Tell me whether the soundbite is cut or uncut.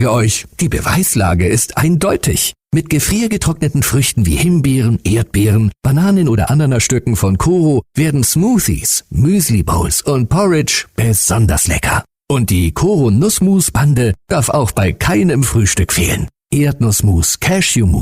uncut